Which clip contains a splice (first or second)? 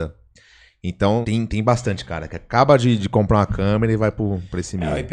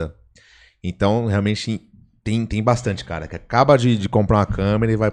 first